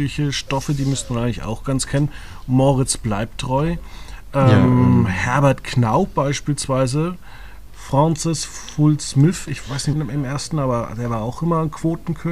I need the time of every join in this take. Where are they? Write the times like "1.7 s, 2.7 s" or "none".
4.3 s, 7.7 s, 9.9 s